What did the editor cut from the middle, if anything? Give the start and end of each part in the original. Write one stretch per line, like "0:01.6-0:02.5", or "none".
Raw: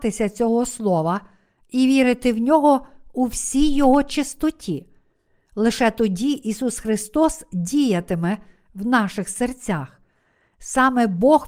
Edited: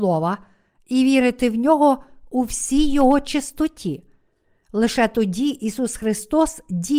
none